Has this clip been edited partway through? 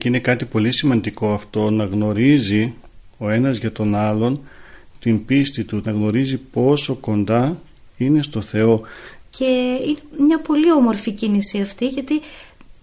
yes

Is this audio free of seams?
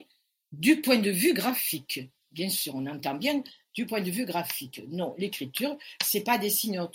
yes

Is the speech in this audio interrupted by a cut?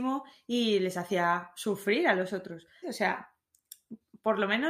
yes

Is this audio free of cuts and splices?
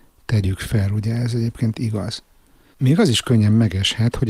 no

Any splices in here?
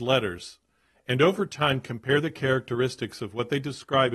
no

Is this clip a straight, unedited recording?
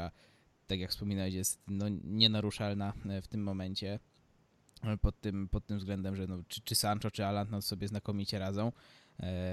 yes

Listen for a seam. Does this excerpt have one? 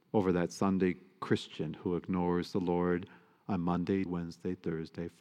yes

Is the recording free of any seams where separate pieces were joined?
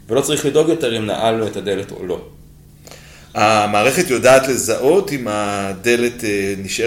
yes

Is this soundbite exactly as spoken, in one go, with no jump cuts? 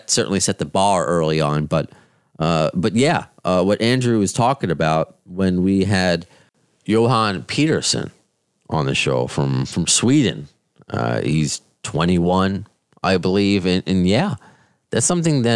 yes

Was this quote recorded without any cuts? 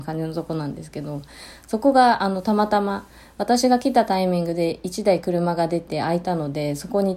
yes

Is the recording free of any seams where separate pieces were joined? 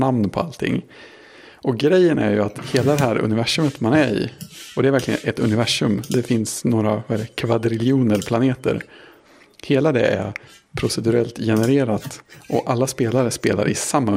yes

